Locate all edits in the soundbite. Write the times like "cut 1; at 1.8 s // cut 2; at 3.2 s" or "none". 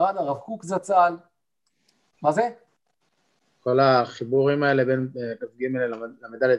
cut 1; at 2.0 s

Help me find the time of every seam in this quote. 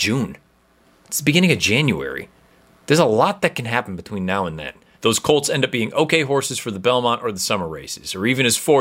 cut 1; at 4.9 s

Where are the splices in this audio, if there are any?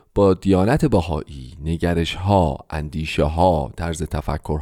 none

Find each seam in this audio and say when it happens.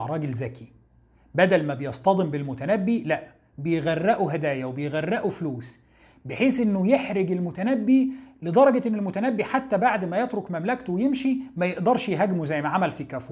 none

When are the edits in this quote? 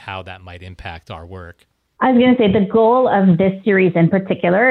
none

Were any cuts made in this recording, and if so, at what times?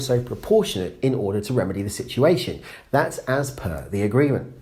none

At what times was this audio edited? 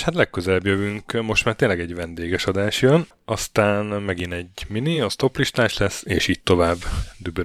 none

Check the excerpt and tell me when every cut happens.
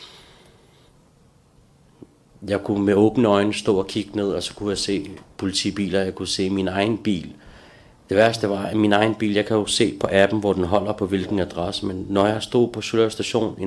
none

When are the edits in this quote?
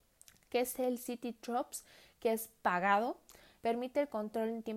cut 1; at 3.6 s

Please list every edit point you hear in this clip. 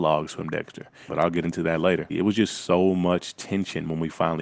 cut 1; at 1.1 s // cut 2; at 2.1 s

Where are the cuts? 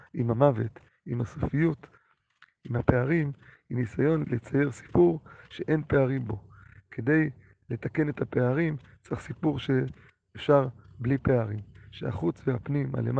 cut 1; at 4.2 s

